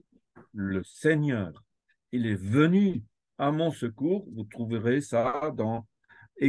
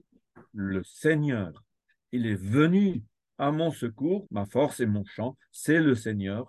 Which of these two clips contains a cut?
second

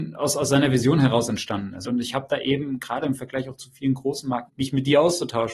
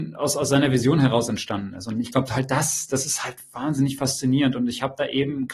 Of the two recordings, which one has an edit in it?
first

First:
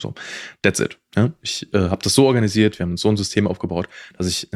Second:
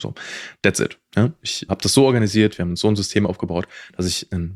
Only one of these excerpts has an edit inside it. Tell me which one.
second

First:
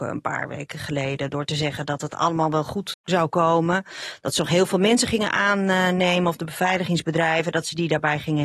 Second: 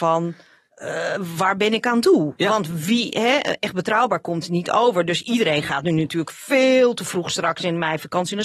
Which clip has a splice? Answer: first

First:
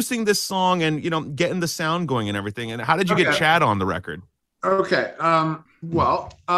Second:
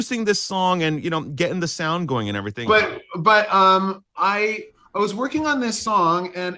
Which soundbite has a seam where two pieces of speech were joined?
second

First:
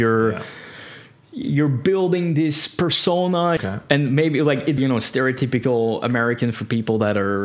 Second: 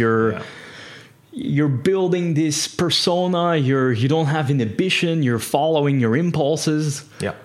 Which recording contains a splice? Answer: first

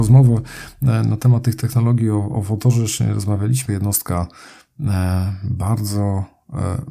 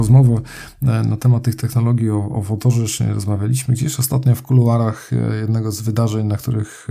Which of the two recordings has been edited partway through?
first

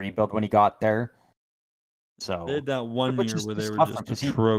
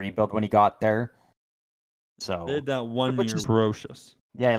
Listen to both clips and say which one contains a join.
second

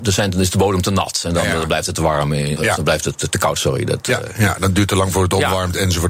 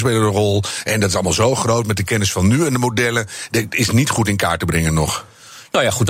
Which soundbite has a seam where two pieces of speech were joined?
first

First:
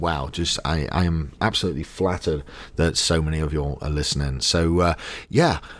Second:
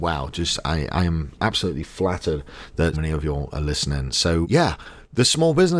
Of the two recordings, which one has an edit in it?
second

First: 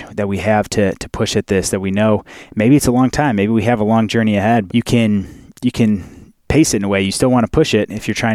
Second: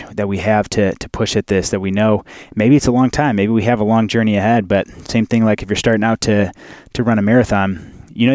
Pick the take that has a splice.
first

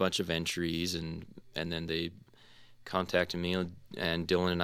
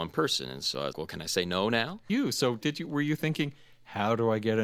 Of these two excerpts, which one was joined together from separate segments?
second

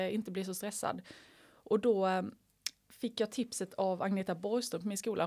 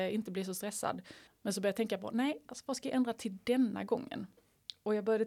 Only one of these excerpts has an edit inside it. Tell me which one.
second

